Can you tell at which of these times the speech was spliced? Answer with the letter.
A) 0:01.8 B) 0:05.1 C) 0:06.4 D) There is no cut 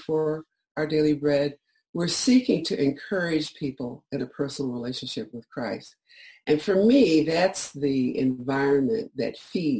A